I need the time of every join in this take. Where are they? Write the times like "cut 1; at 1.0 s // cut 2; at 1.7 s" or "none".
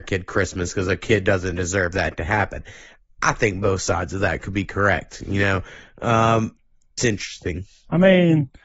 cut 1; at 7.0 s